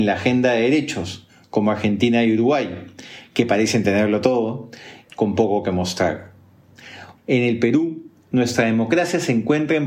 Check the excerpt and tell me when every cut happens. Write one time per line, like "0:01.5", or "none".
0:05.1
0:07.2